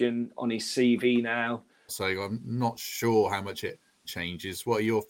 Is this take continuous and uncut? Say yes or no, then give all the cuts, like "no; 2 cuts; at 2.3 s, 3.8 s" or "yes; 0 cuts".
no; 2 cuts; at 1.9 s, 4.0 s